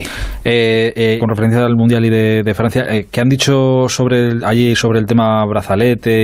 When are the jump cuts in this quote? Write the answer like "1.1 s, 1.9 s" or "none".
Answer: 1.2 s